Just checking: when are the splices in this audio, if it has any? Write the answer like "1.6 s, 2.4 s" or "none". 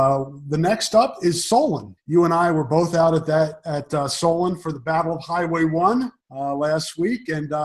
2.0 s, 6.2 s